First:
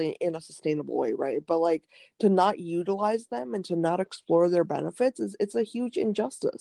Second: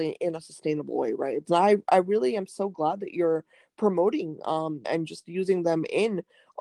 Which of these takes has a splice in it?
second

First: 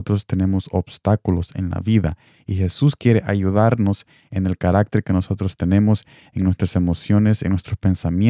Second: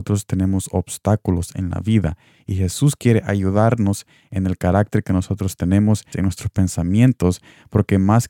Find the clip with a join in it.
second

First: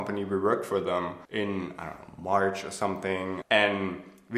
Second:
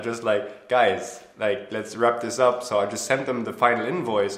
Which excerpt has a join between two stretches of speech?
first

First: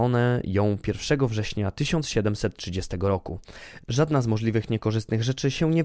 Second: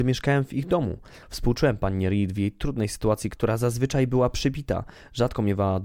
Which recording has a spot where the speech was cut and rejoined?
second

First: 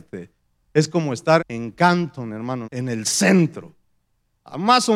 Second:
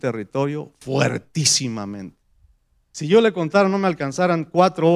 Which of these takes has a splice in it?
first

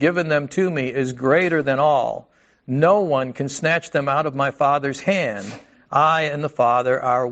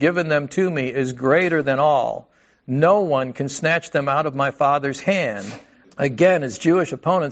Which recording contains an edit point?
second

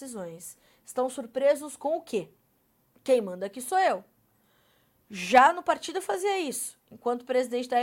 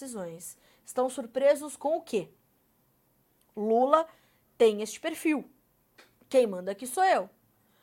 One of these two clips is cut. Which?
first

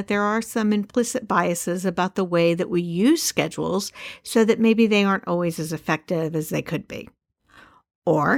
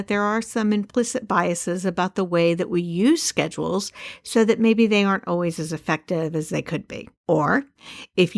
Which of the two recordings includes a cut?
second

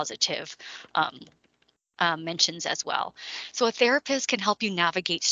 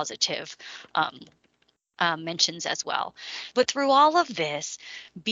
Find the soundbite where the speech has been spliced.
second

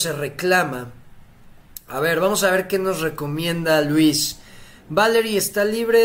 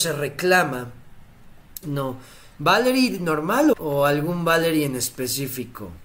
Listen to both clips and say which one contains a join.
second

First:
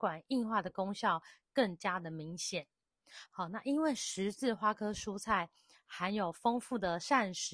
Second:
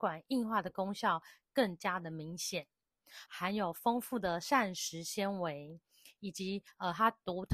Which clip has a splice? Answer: second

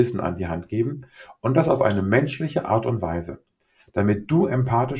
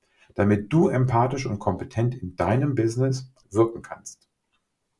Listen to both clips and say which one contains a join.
second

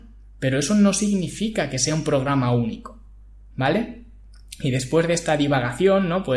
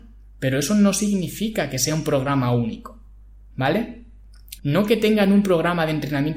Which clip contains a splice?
second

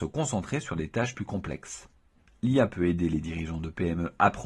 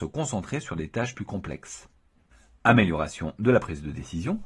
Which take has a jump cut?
first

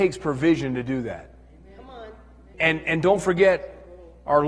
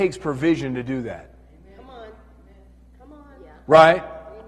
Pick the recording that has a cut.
first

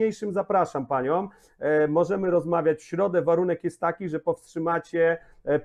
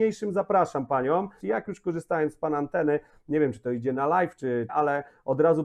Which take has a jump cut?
second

